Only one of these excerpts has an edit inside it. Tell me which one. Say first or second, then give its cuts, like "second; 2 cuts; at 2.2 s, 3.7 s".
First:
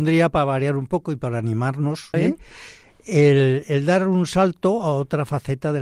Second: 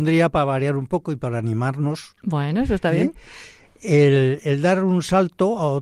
first; 1 cut; at 2.1 s